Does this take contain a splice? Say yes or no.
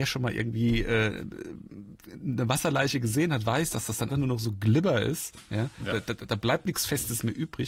yes